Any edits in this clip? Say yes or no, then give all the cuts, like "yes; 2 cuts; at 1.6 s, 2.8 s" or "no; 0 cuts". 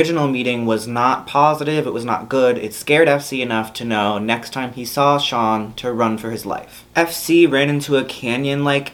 no; 0 cuts